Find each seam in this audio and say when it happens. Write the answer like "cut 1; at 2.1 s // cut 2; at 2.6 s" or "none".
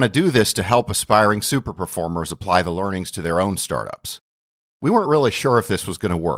none